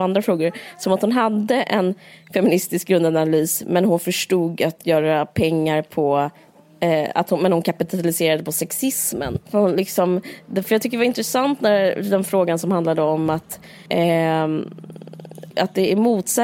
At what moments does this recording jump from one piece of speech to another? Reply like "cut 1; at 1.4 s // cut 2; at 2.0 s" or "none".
cut 1; at 9.4 s // cut 2; at 13.9 s // cut 3; at 15.5 s